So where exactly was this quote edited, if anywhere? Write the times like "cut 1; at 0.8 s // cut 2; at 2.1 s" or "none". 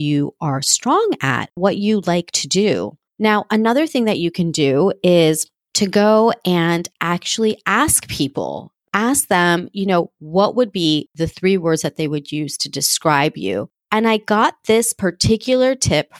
cut 1; at 1.6 s // cut 2; at 3.1 s